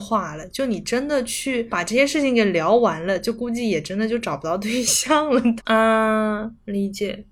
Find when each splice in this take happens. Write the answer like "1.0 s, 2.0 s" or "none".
5.6 s